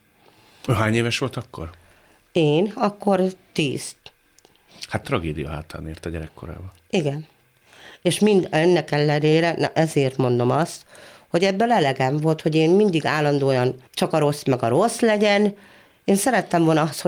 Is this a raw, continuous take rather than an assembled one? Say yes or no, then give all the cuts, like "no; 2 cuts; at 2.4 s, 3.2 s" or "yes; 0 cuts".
no; 2 cuts; at 5.0 s, 13.9 s